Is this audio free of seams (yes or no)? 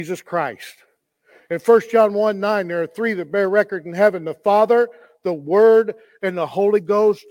yes